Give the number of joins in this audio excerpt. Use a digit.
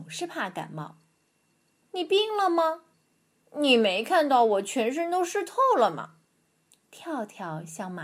3